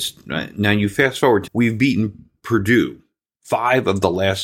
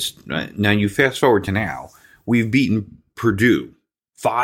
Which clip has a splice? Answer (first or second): first